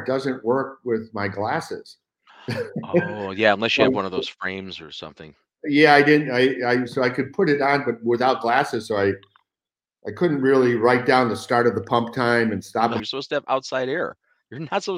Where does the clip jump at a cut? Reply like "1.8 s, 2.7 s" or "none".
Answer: 13.0 s

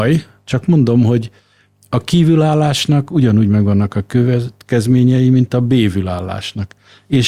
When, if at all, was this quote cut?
none

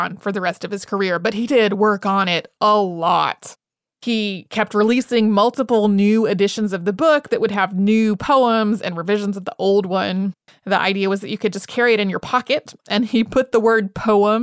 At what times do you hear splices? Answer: 10.5 s

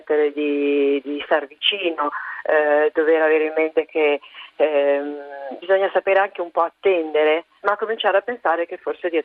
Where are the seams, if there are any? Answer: 5.6 s, 7.6 s

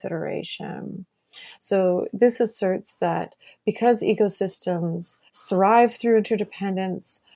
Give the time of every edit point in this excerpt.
1.6 s, 5.3 s

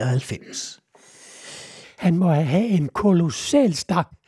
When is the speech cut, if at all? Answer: 1.8 s

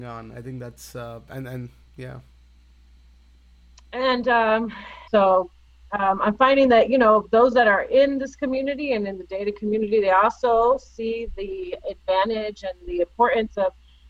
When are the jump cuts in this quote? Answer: 5.1 s

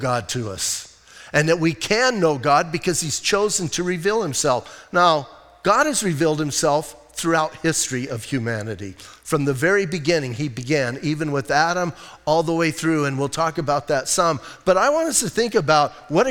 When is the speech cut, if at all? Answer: none

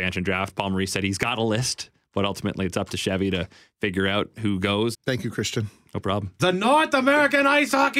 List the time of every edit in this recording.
4.9 s, 6.4 s

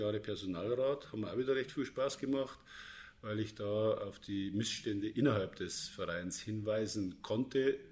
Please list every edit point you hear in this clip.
none

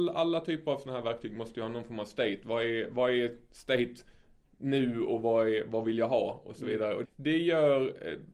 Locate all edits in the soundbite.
7.0 s

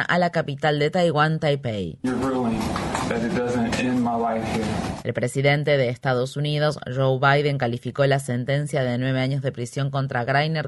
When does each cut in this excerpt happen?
2.0 s

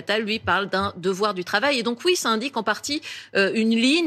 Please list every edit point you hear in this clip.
none

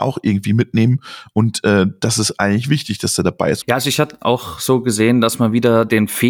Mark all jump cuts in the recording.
3.6 s

